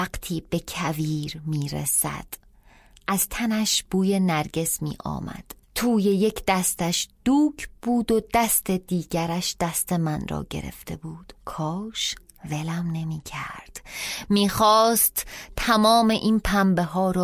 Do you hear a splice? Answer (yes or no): yes